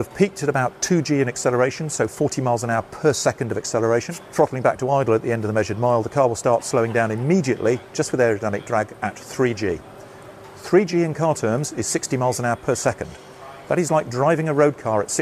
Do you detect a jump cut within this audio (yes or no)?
no